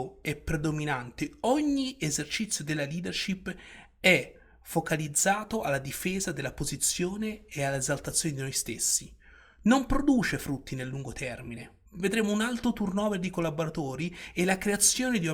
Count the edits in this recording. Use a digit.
1